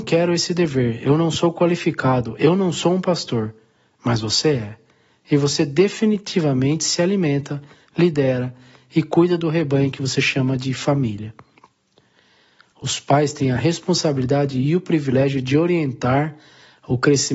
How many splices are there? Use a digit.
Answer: 2